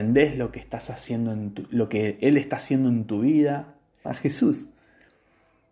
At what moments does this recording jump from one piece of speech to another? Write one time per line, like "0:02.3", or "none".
0:04.0